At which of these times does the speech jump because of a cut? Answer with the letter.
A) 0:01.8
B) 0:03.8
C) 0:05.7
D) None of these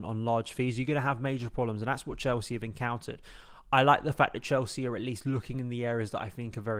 D